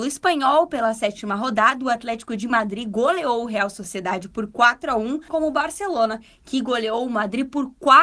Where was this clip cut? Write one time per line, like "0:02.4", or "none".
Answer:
0:05.3